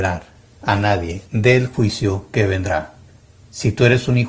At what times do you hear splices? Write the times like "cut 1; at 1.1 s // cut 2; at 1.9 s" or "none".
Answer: cut 1; at 1.3 s